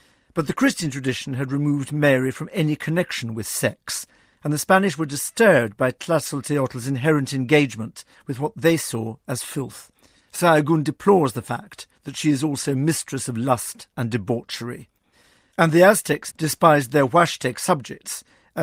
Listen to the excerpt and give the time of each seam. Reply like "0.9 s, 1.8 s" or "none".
16.3 s